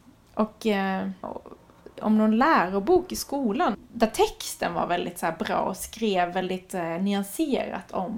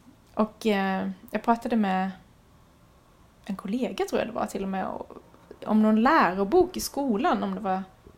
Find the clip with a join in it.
first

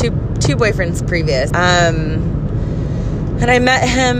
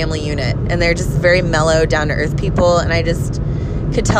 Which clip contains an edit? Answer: first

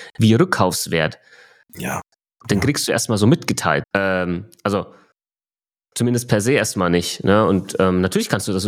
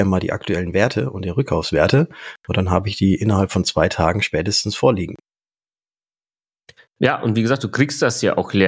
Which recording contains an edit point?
first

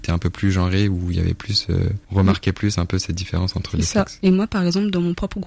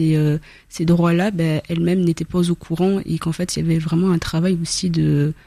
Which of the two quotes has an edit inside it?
first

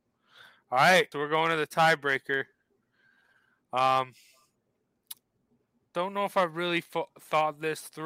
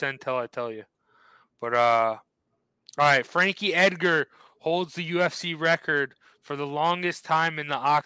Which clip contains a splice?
first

